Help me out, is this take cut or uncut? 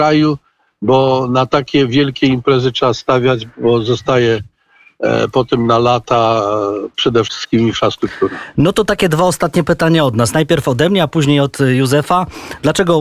uncut